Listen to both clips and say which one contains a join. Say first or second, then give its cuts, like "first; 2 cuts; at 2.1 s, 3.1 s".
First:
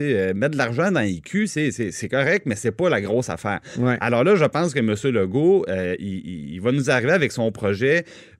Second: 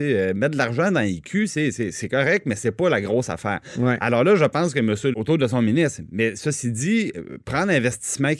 second; 1 cut; at 5.1 s